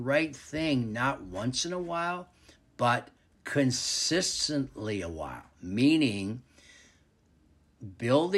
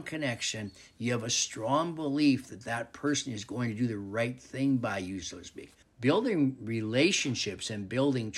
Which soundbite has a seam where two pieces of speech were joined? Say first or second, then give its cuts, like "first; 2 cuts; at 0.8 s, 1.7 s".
second; 1 cut; at 5.8 s